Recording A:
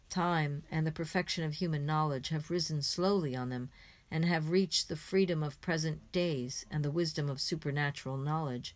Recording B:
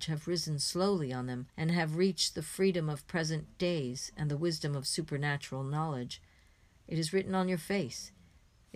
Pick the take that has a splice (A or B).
B